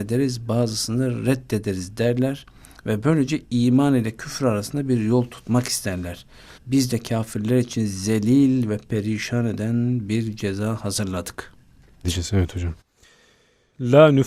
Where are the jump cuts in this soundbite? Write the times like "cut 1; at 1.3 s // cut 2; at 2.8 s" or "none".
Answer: cut 1; at 6.6 s // cut 2; at 12.0 s